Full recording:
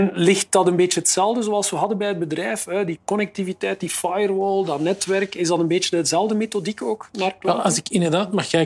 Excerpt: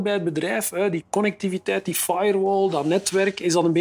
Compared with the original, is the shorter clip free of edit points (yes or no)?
yes